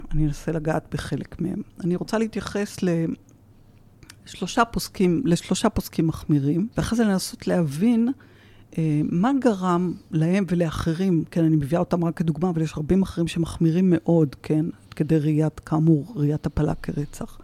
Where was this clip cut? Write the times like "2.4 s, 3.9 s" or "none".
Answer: 6.7 s